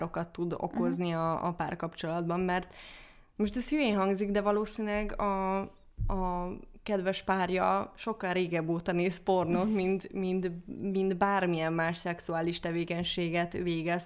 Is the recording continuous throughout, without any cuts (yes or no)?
yes